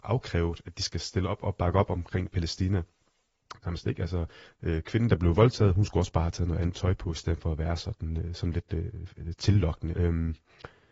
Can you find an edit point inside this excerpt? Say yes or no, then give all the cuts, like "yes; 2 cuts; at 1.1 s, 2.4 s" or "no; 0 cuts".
yes; 2 cuts; at 3.6 s, 9.9 s